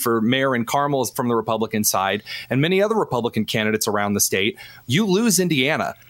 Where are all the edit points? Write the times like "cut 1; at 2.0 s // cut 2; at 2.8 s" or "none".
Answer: cut 1; at 4.8 s